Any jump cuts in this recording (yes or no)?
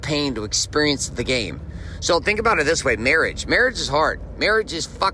no